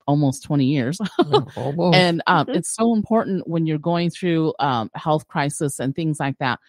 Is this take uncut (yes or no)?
yes